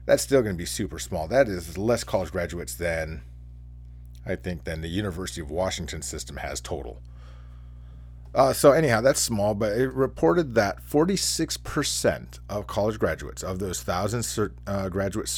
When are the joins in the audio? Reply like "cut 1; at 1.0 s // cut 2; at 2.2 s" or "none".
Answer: none